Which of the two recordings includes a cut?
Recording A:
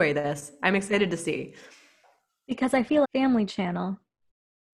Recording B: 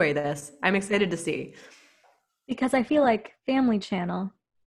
A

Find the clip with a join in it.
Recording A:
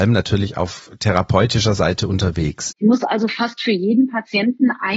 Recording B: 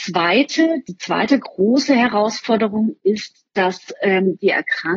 A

